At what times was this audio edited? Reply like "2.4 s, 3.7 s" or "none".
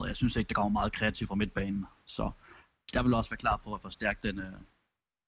none